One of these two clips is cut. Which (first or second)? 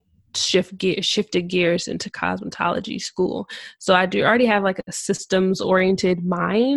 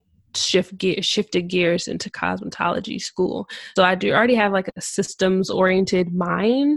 second